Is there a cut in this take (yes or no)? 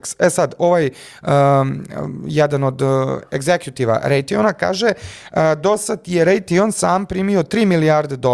no